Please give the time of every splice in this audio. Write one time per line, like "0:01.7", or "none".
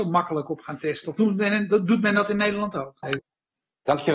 0:03.0